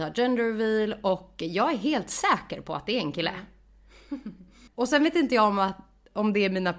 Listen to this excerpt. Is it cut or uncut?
cut